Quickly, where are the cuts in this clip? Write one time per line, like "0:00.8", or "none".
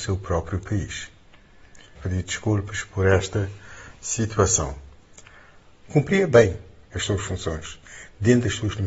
0:02.0
0:05.8